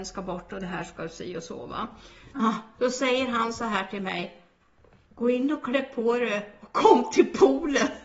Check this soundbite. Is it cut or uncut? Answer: cut